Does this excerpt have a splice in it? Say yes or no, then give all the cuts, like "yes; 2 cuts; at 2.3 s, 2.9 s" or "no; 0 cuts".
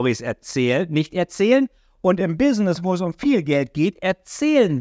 no; 0 cuts